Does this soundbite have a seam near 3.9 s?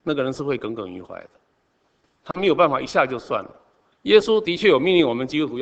yes; 1 cut; at 3.9 s

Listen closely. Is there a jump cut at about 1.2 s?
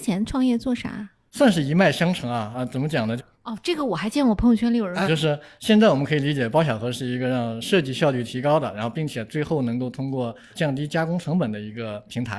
no; 2 cuts; at 3.2 s, 5.0 s

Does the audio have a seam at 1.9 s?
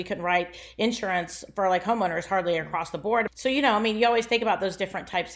no; 1 cut; at 3.3 s

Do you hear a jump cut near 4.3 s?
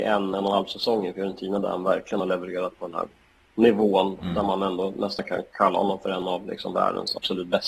no; 0 cuts

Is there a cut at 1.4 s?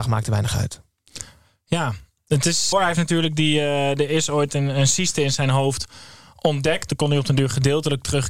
no; 2 cuts; at 2.7 s, 6.9 s

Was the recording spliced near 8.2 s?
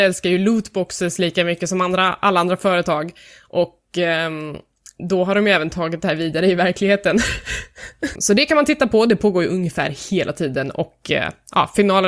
yes; 1 cut; at 8.2 s

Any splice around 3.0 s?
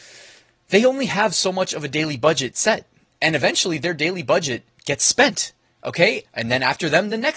no; 1 cut; at 6.2 s

